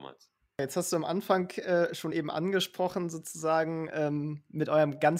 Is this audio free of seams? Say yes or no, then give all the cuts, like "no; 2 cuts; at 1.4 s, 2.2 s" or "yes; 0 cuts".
yes; 0 cuts